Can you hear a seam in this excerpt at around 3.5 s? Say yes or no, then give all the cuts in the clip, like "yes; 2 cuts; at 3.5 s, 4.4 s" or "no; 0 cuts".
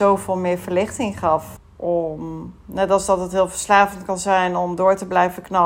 no; 1 cut; at 1.6 s